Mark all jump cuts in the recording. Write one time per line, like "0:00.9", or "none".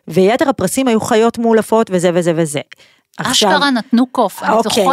none